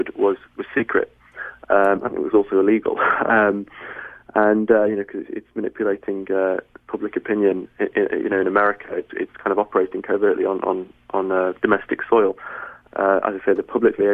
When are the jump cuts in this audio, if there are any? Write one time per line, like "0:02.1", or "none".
0:11.6
0:12.9